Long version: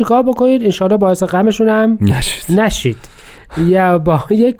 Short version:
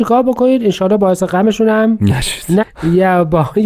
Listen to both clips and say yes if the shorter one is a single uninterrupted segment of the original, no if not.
no